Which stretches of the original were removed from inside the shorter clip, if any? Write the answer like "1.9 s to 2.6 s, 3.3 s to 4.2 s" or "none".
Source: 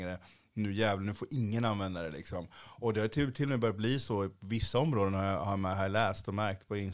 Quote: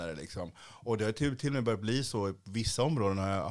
none